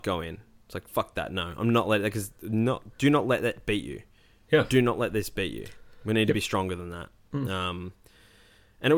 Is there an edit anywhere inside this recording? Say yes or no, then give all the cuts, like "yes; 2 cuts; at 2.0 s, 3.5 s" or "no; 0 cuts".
no; 0 cuts